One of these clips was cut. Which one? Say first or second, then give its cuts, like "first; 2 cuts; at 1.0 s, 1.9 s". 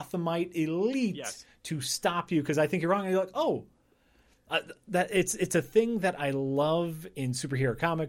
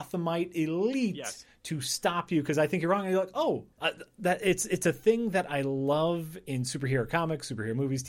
second; 1 cut; at 3.7 s